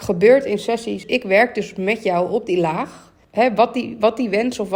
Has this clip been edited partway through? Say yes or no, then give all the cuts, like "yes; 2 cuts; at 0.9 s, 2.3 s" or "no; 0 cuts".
yes; 2 cuts; at 1.0 s, 3.2 s